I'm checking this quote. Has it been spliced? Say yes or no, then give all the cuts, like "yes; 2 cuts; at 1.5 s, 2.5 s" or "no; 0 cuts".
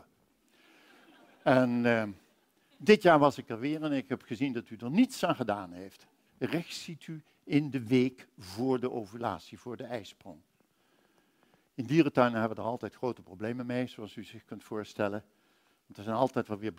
yes; 1 cut; at 6.3 s